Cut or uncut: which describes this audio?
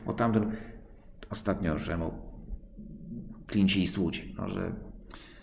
uncut